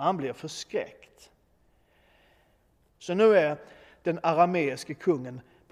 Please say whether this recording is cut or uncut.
cut